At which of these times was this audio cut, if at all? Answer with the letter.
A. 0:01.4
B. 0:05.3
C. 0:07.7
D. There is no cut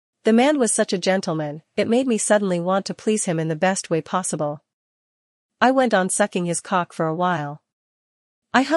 D